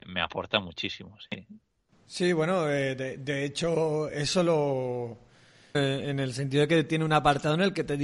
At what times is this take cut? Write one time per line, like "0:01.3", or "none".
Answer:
0:05.7

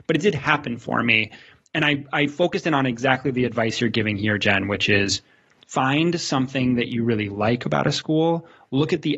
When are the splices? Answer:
none

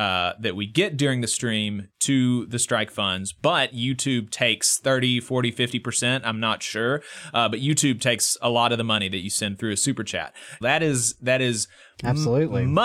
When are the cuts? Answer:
0:10.6

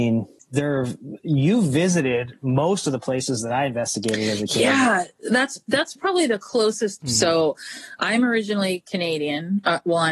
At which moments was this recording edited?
0:07.0

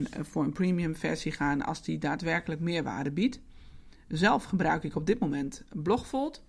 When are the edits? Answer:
none

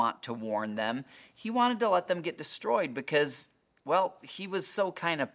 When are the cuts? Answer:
none

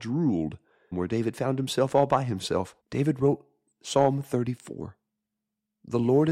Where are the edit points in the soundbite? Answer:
0:00.9
0:02.8

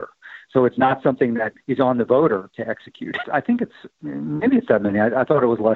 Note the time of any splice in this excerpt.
0:03.2

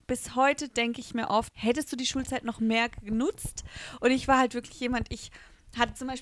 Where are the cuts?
0:01.5

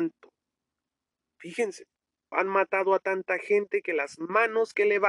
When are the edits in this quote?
0:02.3

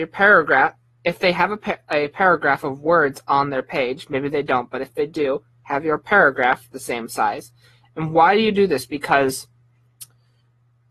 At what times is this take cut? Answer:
none

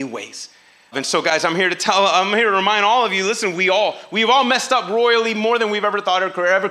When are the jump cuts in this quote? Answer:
0:00.9

